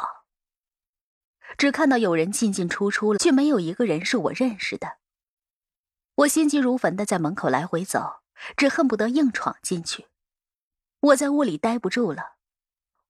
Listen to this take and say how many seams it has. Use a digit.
2